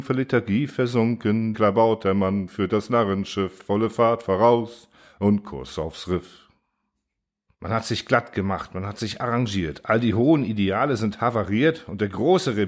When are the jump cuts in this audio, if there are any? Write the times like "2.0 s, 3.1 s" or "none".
1.5 s